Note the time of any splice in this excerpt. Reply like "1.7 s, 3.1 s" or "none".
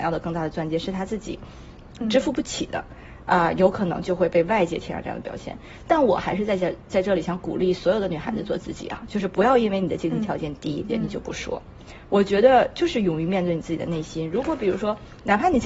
10.9 s